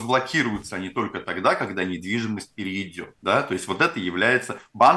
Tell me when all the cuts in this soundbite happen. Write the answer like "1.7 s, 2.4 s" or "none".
3.2 s